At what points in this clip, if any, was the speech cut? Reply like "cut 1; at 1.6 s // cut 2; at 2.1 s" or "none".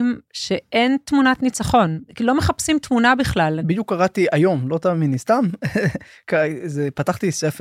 cut 1; at 3.6 s